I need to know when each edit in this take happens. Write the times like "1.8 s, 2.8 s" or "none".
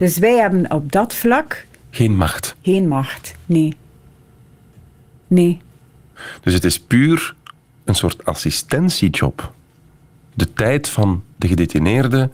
none